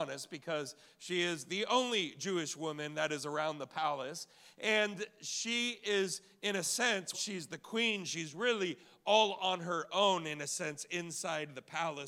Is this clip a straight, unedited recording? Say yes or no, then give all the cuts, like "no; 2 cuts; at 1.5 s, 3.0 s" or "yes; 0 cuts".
no; 1 cut; at 7.1 s